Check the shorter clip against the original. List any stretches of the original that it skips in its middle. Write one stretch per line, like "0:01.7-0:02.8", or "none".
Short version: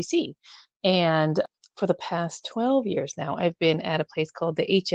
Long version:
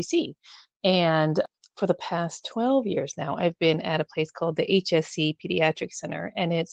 none